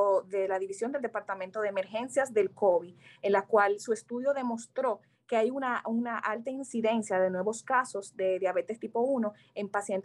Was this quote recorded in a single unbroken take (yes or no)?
yes